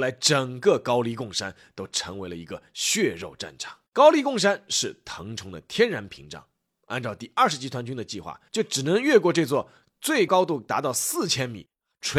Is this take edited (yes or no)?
yes